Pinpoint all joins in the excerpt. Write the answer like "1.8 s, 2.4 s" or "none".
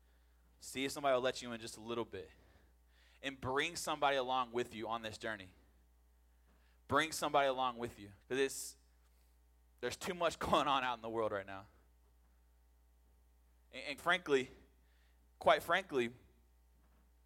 8.2 s, 14.0 s